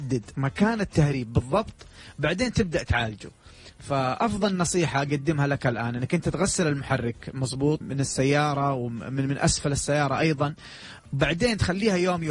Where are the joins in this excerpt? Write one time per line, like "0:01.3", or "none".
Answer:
0:07.8